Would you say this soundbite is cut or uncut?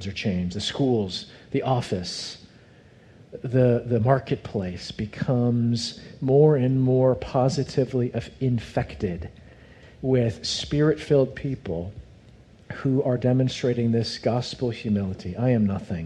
uncut